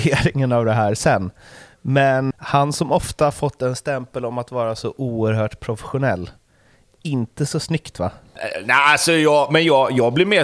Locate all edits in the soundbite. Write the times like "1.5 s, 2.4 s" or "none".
2.3 s